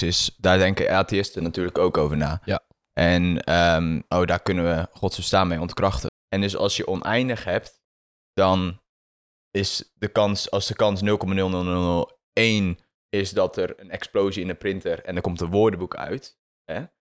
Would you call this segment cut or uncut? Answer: cut